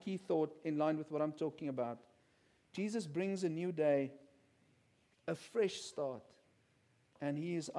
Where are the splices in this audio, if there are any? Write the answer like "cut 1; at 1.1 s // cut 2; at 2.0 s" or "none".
none